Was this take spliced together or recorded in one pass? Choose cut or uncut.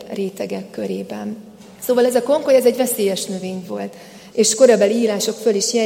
cut